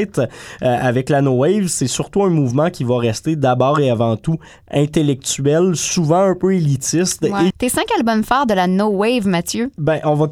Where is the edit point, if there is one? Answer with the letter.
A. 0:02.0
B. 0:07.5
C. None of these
B